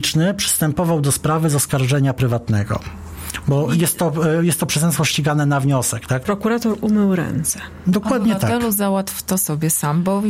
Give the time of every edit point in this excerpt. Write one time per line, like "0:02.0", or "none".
0:06.2